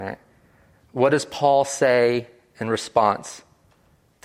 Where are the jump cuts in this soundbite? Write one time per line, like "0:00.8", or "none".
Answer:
none